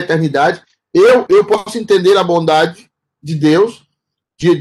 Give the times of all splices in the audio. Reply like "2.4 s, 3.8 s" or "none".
1.3 s